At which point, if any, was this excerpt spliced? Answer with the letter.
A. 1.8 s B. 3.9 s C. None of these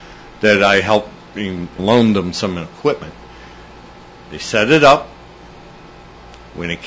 A